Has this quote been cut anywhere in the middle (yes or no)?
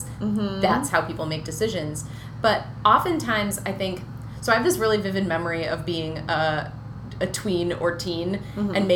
no